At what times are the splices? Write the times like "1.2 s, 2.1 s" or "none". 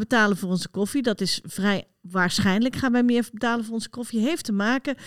none